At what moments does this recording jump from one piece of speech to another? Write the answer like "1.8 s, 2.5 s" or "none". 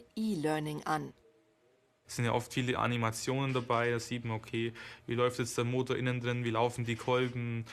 none